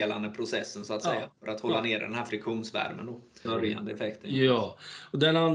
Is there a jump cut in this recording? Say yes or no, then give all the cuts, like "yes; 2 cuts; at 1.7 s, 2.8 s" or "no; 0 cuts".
yes; 1 cut; at 3.4 s